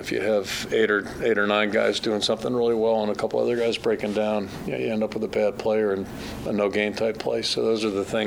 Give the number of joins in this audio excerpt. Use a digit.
0